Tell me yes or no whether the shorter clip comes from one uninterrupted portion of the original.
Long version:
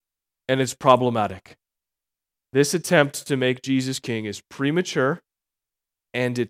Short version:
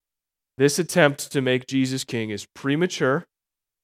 yes